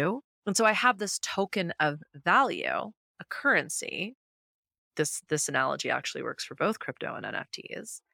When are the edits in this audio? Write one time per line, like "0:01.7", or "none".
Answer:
none